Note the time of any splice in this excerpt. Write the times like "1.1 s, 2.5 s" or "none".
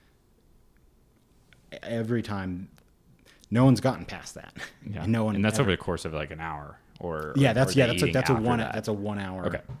none